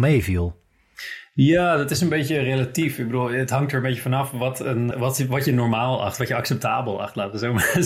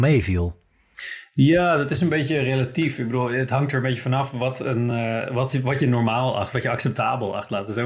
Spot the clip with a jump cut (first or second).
first